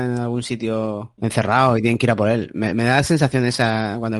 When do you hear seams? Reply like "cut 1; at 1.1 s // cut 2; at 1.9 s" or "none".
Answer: cut 1; at 1.2 s